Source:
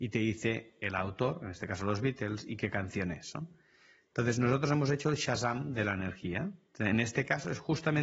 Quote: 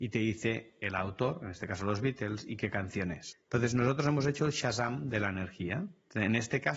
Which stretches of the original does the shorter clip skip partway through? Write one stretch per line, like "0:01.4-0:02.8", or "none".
0:03.3-0:04.0